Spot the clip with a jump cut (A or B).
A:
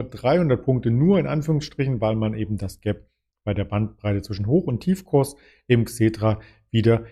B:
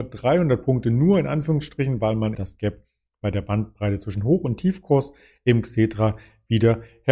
B